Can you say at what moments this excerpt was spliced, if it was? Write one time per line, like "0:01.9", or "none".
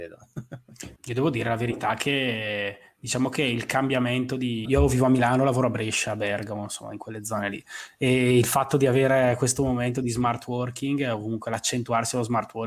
0:01.0
0:04.6

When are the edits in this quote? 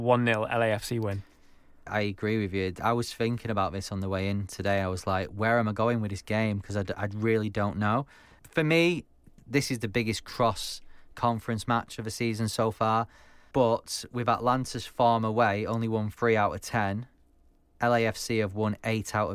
none

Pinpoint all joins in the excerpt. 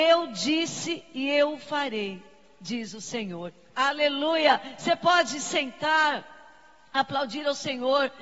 none

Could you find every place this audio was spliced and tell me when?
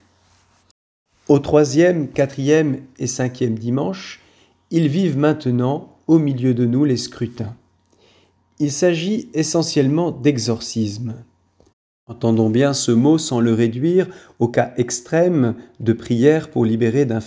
none

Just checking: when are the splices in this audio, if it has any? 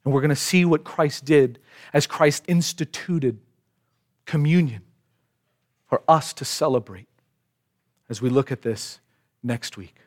0:02.4

